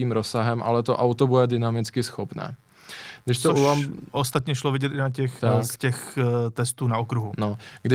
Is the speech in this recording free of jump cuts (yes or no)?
no